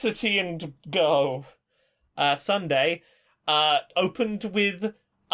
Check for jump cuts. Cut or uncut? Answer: cut